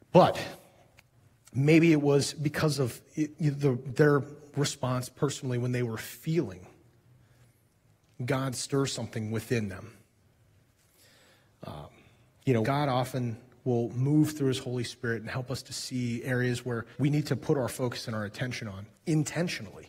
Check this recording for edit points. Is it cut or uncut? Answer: cut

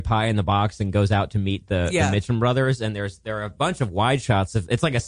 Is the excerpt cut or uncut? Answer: uncut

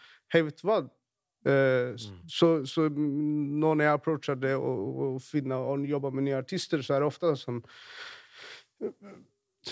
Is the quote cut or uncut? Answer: cut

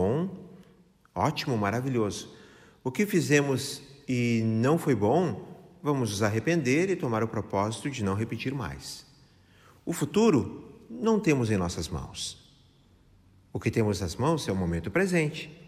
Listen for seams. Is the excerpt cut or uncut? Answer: uncut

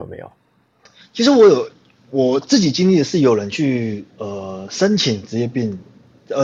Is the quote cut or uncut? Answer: uncut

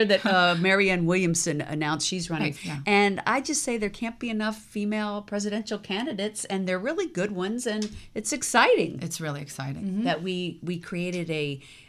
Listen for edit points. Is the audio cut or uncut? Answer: cut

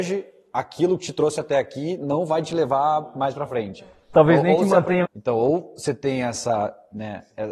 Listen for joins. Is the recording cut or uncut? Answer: cut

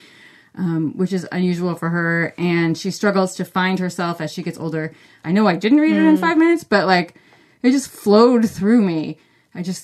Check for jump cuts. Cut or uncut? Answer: cut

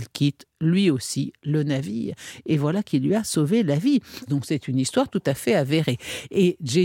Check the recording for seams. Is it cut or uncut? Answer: cut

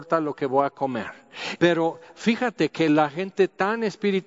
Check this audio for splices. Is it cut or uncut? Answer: cut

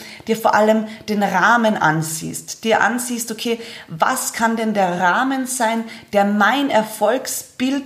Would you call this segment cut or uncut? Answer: uncut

